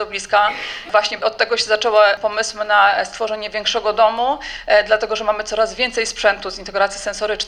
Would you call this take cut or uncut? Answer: uncut